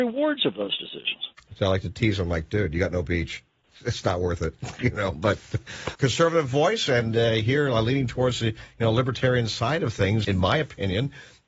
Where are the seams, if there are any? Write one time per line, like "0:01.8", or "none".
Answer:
0:01.5
0:06.0
0:10.2